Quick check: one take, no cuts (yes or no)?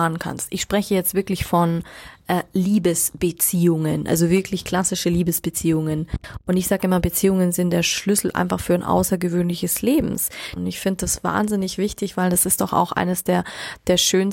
no